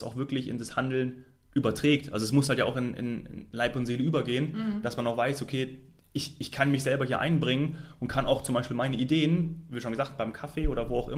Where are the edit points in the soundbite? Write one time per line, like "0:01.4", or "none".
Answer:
none